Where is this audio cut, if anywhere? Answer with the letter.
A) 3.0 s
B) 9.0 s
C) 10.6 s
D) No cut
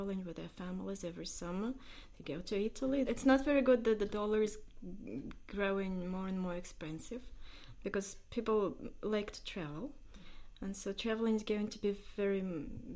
A